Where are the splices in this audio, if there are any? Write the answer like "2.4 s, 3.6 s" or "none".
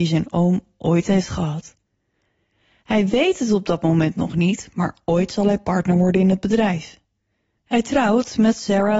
7.6 s

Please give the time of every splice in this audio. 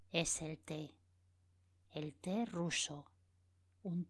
none

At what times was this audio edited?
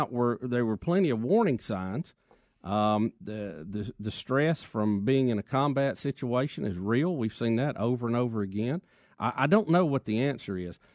none

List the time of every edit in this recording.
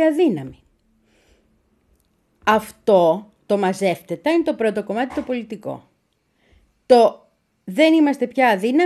none

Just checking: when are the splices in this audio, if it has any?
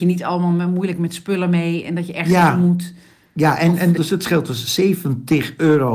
4.0 s

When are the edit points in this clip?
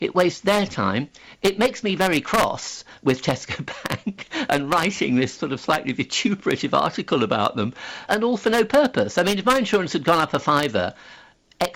8.1 s

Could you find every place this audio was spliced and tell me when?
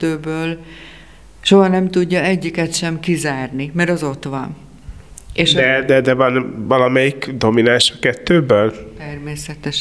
none

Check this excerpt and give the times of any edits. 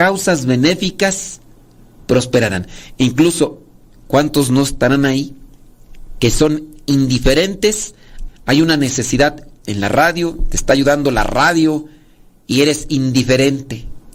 8.3 s

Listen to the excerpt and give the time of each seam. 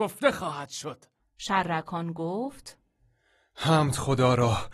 1.2 s

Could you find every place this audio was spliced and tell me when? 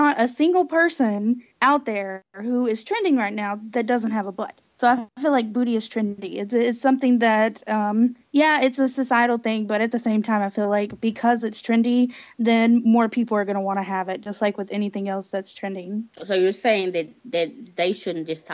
none

